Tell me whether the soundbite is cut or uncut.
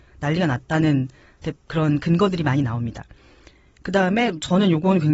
uncut